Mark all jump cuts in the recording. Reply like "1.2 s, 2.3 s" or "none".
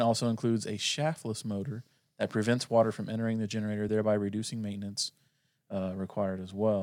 none